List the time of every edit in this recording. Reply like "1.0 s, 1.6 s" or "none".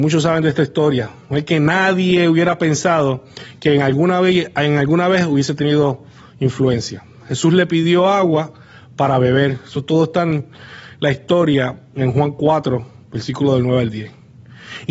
7.2 s

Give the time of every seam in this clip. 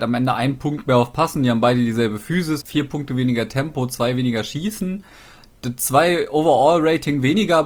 2.6 s

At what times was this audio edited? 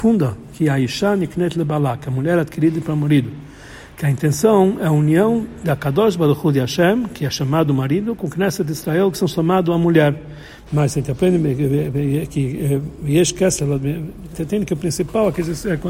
9.1 s, 10.7 s, 14.3 s

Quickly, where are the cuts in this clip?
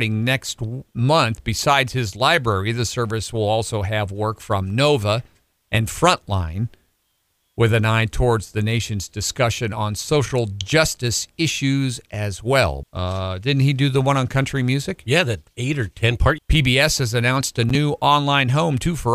12.8 s, 16.4 s

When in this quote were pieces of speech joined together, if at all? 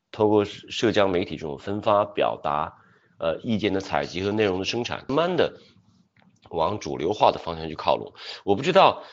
5.1 s

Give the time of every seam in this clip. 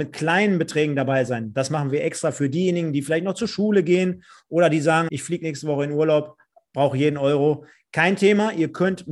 5.1 s

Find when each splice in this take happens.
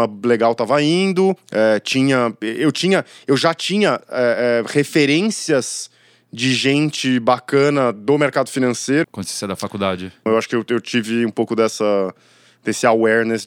9.0 s, 10.3 s

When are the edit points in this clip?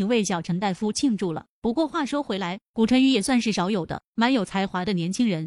none

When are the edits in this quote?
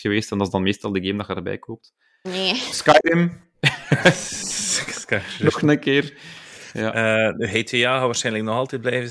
2.2 s

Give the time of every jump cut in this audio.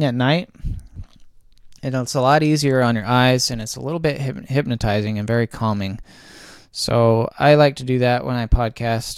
none

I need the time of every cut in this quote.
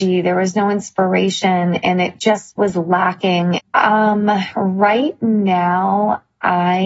3.6 s

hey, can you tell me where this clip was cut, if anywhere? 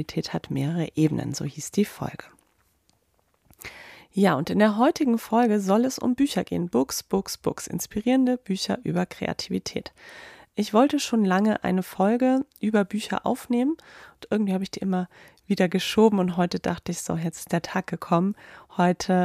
none

